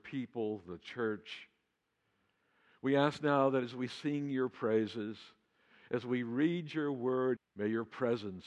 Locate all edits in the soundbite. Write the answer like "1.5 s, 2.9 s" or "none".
7.4 s